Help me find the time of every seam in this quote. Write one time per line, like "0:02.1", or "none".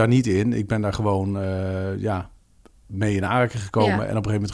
none